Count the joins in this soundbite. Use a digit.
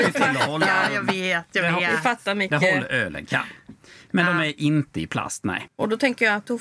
1